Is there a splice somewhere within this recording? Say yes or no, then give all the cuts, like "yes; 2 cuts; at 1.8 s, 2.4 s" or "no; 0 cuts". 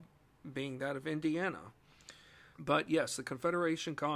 yes; 1 cut; at 2.5 s